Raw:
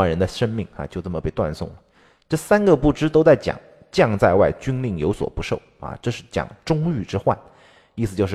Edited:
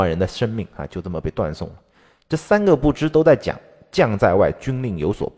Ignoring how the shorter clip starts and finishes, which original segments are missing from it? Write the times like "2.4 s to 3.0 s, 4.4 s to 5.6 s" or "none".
none